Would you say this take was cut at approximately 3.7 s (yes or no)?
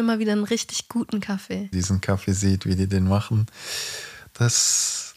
no